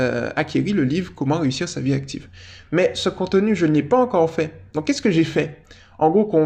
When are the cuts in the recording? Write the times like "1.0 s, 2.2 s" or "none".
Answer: none